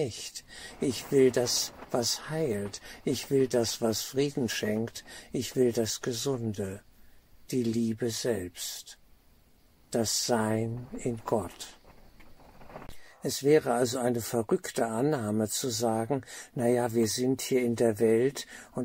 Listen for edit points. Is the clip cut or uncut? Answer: uncut